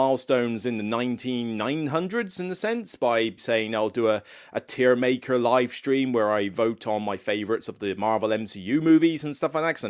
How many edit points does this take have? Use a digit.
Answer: 1